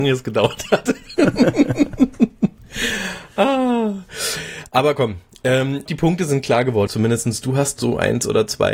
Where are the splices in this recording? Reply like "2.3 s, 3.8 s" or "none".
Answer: 5.9 s, 6.9 s